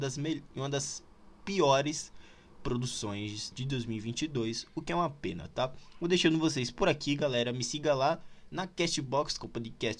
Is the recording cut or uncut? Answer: cut